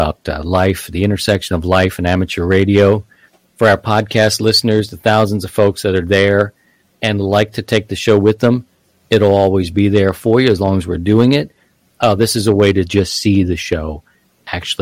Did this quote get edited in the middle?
no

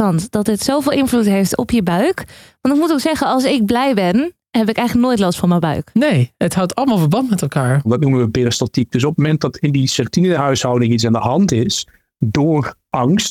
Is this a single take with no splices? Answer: no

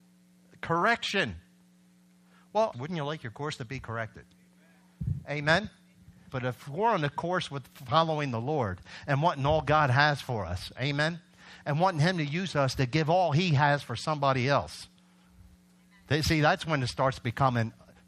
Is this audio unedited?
no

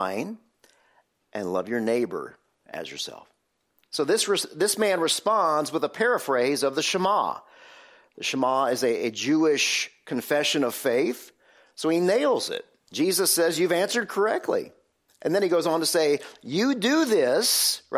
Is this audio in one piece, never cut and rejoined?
yes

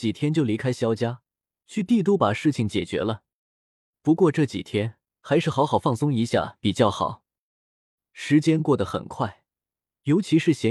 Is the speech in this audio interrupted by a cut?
no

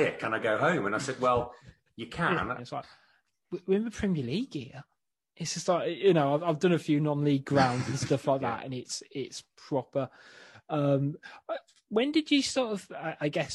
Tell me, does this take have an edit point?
yes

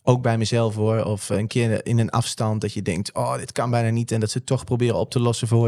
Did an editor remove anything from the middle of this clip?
no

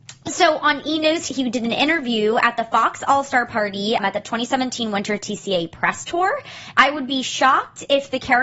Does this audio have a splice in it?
yes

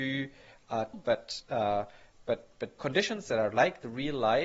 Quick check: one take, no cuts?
no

